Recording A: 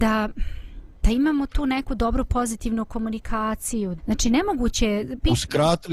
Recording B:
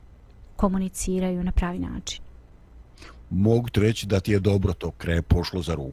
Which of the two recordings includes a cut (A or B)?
A